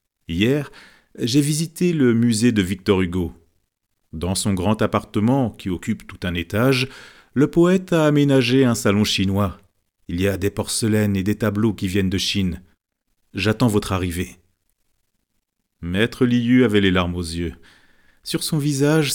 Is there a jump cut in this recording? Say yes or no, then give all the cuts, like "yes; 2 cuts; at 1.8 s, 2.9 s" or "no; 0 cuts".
no; 0 cuts